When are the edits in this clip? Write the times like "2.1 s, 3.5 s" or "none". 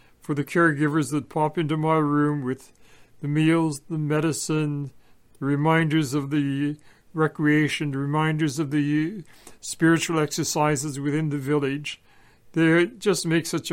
none